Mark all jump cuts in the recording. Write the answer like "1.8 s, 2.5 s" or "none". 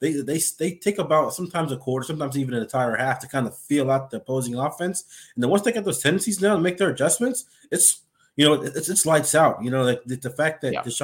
none